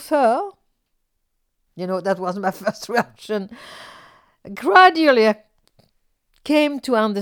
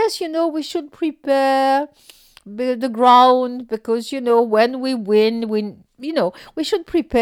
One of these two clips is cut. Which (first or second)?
first